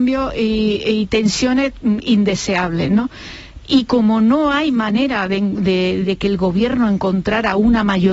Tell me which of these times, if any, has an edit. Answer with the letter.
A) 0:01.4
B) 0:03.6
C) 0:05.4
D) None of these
B